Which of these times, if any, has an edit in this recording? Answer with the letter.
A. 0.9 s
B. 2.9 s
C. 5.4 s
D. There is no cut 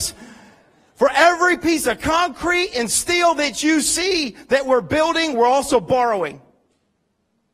D